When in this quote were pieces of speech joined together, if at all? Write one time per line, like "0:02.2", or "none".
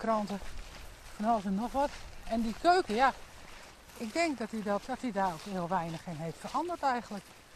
0:04.8

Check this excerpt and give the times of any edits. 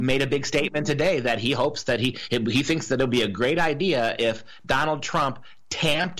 none

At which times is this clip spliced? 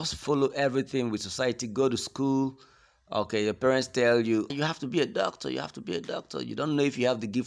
0:04.5

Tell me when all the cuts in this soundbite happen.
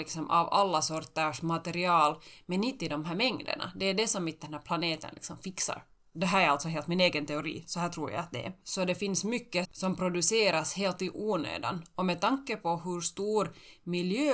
0:08.6
0:09.6

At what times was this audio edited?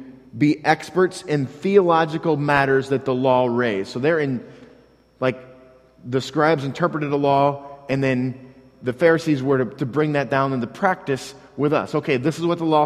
none

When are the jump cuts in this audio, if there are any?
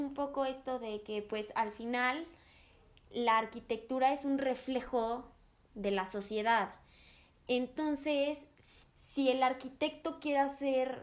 0:08.8

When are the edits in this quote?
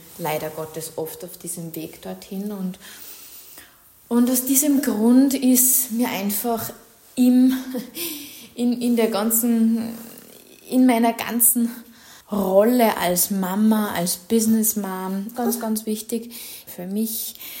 0:12.2
0:15.3
0:16.7

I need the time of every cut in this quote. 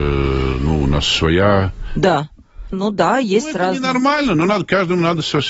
0:02.7

